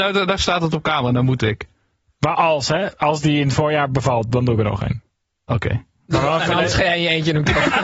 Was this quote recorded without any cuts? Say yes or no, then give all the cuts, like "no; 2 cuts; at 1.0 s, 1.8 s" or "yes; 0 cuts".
yes; 0 cuts